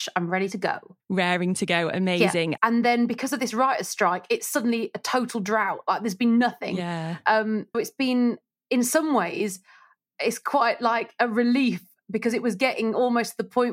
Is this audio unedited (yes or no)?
no